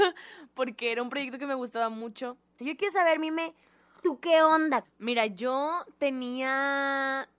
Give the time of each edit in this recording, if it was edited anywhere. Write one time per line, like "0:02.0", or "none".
0:02.6
0:04.8